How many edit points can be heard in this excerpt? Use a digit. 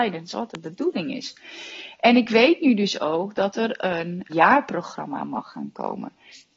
1